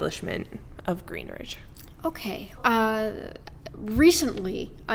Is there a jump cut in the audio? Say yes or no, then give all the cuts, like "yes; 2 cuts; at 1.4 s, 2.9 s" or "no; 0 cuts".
yes; 1 cut; at 2.6 s